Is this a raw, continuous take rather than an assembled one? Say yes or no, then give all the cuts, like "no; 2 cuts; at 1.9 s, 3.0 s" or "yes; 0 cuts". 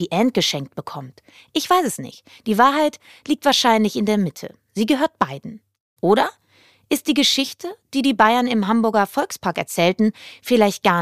yes; 0 cuts